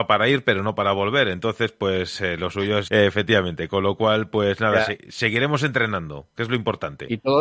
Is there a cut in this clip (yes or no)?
yes